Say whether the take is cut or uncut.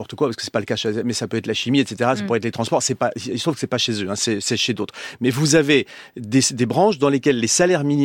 uncut